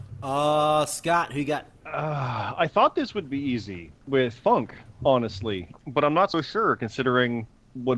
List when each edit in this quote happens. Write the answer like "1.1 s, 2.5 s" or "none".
1.7 s, 4.0 s, 5.7 s